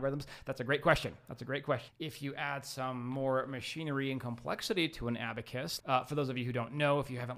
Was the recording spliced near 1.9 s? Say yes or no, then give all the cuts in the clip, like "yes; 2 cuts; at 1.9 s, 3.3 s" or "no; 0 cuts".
yes; 2 cuts; at 1.9 s, 5.8 s